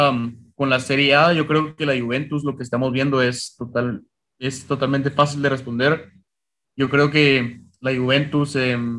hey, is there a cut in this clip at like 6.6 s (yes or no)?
yes